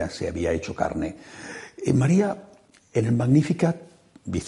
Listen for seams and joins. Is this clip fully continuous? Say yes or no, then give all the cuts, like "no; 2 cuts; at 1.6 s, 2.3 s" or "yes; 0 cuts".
yes; 0 cuts